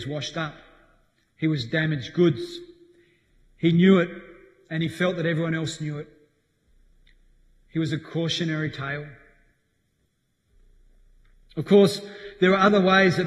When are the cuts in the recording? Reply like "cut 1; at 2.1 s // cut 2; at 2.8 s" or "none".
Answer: none